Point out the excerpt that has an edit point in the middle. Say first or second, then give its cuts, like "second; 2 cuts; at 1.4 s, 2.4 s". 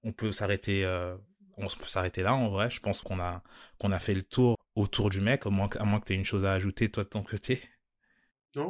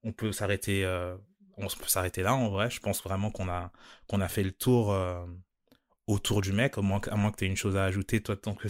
first; 2 cuts; at 3.0 s, 4.5 s